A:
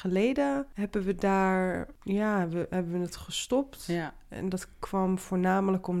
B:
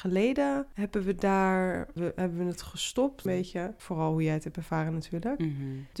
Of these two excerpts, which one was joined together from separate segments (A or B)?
B